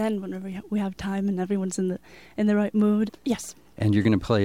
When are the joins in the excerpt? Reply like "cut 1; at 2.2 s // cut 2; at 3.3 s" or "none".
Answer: cut 1; at 3.1 s